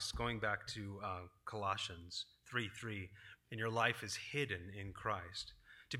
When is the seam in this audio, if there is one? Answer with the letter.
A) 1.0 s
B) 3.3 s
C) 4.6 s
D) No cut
B